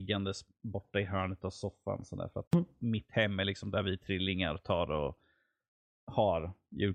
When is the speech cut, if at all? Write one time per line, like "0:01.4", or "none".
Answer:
0:02.5